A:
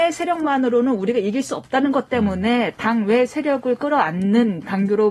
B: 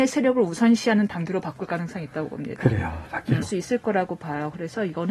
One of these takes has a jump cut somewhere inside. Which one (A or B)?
B